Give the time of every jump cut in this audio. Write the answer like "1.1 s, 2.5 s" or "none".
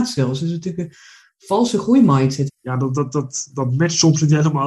2.5 s